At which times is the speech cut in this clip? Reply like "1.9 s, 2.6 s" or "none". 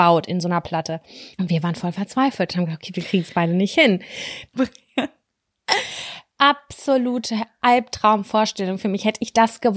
1.3 s, 4.5 s